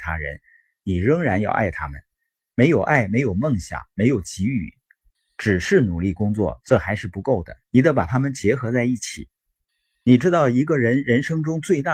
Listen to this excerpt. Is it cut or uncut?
cut